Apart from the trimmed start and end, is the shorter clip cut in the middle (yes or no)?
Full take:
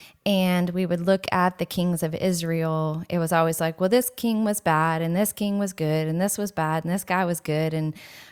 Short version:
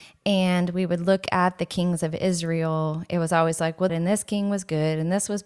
yes